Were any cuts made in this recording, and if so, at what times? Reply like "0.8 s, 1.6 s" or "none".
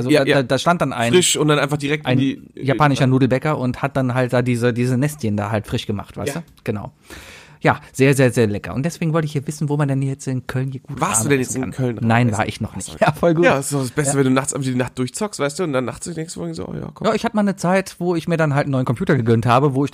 13.0 s